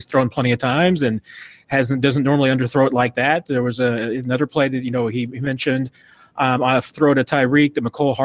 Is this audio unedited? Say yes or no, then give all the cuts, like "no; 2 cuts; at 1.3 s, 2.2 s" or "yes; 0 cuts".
yes; 0 cuts